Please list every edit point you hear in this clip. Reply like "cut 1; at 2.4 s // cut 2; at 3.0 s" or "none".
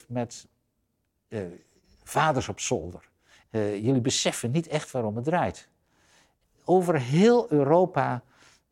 cut 1; at 3.4 s